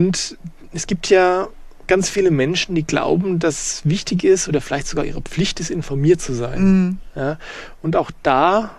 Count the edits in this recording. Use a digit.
0